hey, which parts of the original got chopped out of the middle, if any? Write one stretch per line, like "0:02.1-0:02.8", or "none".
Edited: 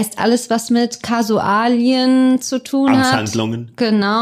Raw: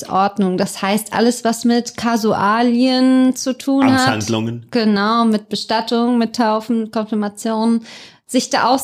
none